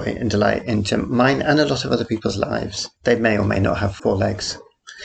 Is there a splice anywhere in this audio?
yes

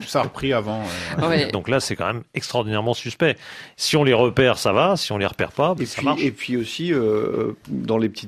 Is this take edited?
yes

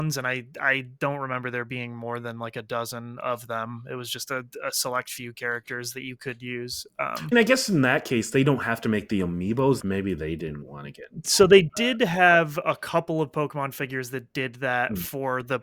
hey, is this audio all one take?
no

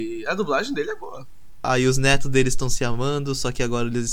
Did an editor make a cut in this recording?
yes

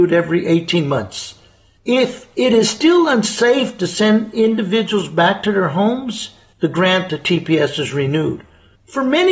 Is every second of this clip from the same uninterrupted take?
yes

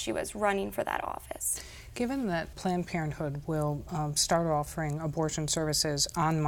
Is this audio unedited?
no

